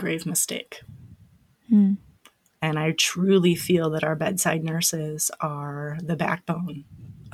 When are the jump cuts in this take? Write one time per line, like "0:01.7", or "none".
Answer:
0:02.6